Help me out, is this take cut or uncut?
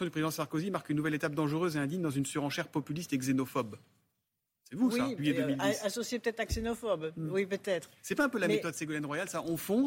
cut